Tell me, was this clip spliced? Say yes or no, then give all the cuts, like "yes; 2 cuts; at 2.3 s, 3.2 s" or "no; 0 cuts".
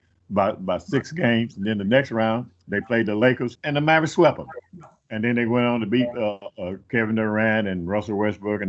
yes; 1 cut; at 3.6 s